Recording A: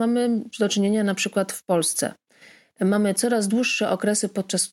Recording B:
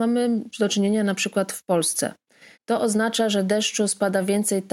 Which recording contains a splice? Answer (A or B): B